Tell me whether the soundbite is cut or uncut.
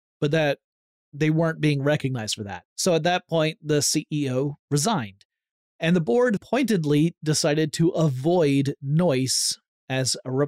cut